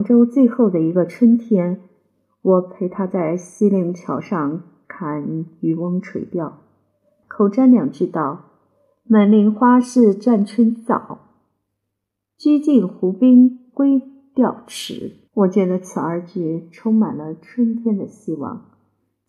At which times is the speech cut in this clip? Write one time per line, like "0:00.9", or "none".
0:07.2
0:15.3